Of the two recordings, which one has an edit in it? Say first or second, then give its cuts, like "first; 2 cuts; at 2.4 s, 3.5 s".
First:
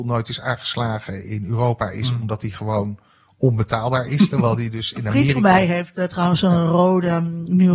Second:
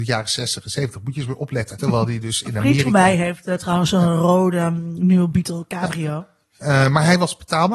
second; 1 cut; at 1.8 s